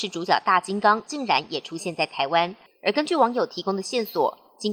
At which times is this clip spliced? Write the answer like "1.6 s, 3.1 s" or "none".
2.7 s